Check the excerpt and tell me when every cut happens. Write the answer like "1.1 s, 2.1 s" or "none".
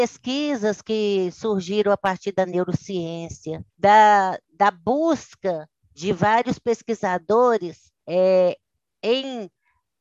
3.7 s, 8.0 s